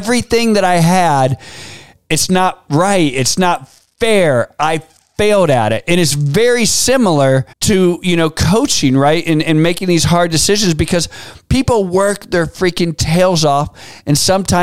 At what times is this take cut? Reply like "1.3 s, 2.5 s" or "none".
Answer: 7.5 s

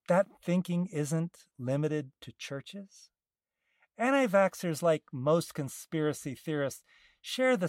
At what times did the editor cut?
none

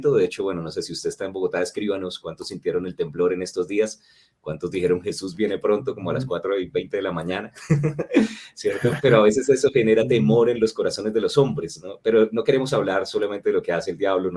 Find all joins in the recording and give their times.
none

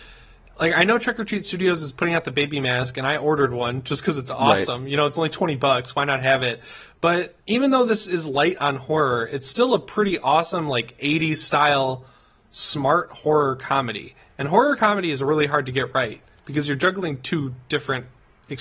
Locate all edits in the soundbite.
7.4 s

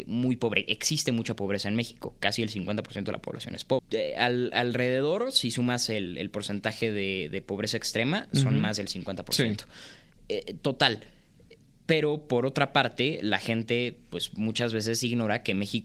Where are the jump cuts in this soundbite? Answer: 3.8 s

